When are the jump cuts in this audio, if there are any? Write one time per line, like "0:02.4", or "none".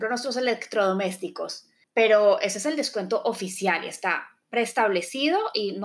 0:01.8